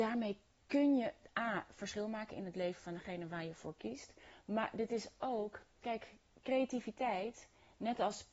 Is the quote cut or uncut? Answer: uncut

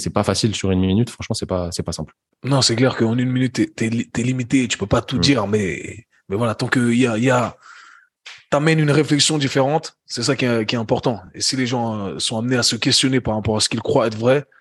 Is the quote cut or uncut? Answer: uncut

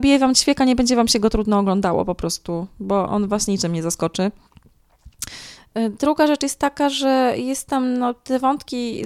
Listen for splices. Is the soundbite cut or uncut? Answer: cut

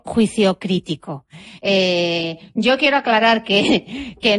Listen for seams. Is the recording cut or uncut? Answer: cut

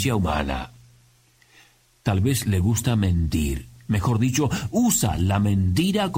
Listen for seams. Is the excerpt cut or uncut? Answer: uncut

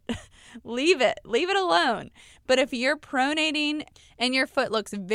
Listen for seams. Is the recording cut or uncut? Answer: uncut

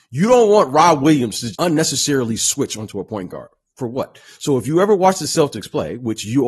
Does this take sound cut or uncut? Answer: cut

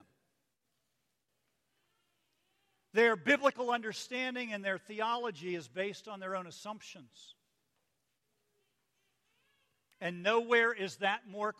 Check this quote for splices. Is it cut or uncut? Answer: uncut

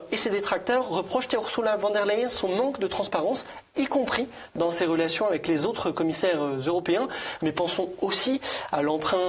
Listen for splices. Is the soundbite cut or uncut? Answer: cut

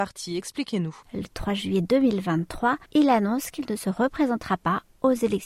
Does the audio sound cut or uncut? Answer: cut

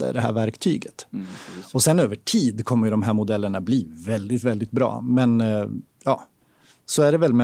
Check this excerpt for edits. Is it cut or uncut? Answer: uncut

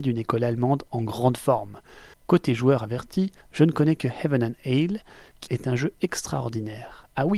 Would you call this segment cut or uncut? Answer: cut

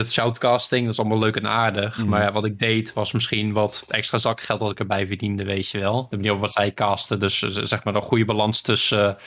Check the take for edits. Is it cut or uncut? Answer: cut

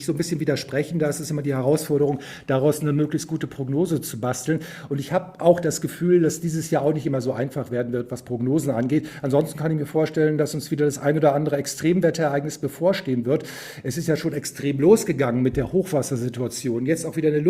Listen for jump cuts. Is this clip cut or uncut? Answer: uncut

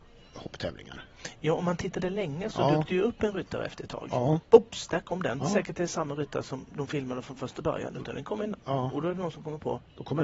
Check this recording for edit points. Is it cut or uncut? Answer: cut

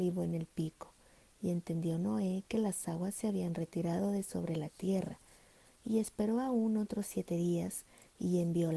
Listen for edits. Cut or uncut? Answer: uncut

